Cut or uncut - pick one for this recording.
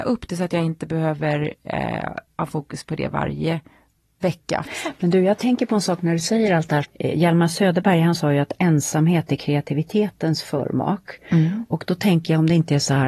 cut